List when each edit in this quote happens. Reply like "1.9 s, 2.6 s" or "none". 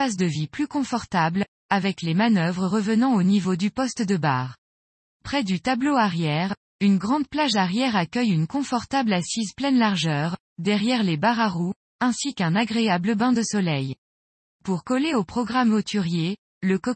none